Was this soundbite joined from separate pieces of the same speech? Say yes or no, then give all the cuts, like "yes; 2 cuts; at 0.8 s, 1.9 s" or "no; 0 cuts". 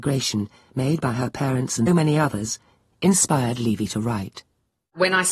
yes; 1 cut; at 1.9 s